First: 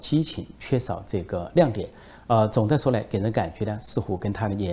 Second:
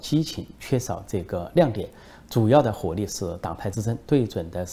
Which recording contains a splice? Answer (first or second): second